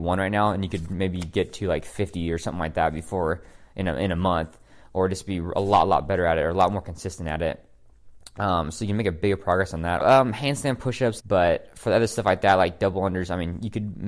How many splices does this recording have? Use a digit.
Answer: 2